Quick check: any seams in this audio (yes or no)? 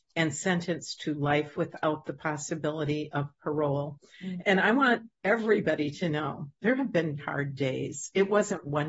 yes